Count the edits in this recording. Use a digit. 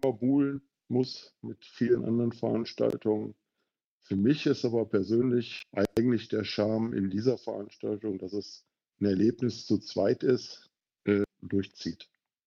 1